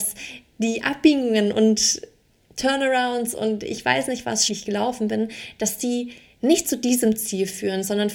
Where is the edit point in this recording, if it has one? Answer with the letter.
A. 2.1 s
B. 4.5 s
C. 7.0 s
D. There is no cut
B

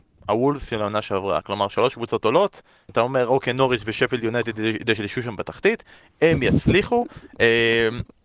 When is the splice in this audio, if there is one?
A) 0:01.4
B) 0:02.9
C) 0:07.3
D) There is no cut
B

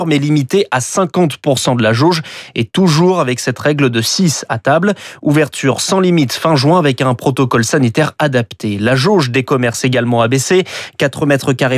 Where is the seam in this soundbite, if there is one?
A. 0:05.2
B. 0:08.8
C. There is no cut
C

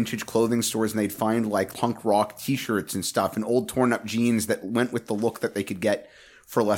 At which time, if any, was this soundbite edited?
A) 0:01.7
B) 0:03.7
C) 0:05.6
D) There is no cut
A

